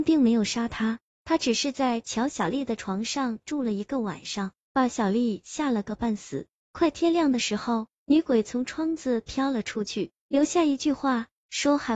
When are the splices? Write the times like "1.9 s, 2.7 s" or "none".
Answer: 4.9 s